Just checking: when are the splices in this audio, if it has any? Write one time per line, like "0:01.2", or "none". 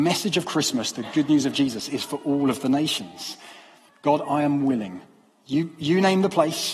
0:03.9